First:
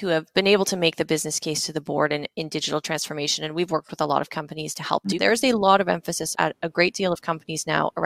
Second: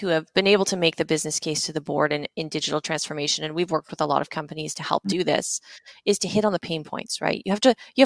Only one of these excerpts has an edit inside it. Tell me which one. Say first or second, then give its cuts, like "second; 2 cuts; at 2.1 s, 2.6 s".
first; 2 cuts; at 5.2 s, 6.3 s